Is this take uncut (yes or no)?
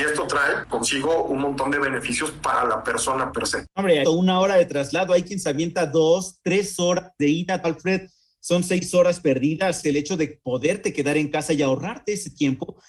no